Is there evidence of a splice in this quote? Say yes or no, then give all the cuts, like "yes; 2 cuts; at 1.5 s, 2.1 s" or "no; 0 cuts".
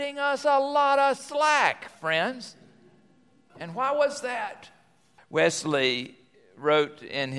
yes; 2 cuts; at 3.5 s, 5.2 s